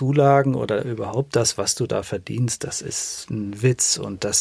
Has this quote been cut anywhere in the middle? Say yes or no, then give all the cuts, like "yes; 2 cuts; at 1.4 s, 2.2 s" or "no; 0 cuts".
yes; 1 cut; at 3.3 s